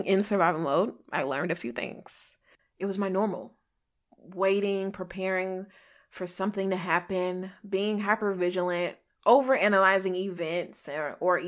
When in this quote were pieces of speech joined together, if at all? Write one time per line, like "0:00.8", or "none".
0:02.6

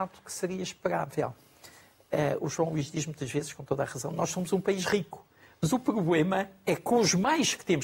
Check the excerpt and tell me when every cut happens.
none

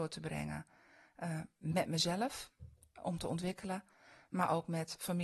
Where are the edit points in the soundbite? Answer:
none

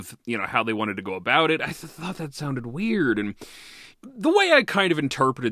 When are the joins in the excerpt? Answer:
0:01.6
0:03.9

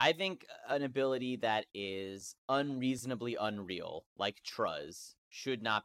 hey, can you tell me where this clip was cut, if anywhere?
none

